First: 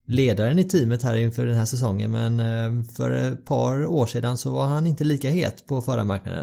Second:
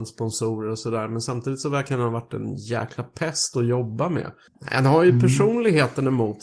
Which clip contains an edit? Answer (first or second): second